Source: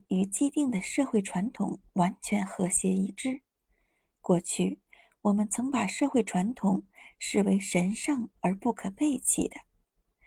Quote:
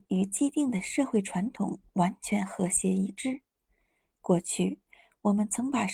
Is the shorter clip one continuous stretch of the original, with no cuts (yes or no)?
yes